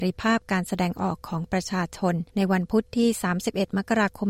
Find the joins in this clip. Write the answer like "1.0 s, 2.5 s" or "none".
2.3 s